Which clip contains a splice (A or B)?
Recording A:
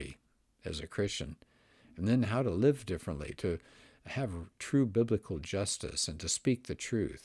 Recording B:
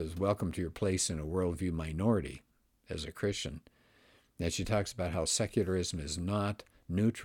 A